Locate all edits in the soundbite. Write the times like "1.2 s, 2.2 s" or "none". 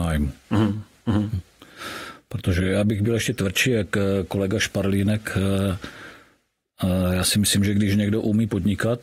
none